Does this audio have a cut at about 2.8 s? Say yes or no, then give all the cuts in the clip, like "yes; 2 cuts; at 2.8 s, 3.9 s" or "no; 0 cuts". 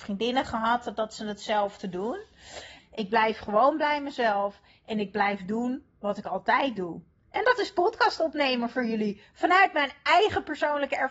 yes; 1 cut; at 2.8 s